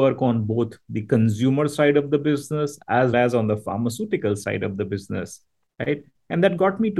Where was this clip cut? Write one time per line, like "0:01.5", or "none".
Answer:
0:03.1